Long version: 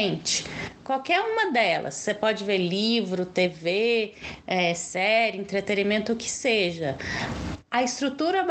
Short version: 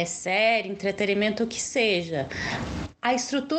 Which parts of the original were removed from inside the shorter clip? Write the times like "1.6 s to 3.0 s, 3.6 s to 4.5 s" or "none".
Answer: none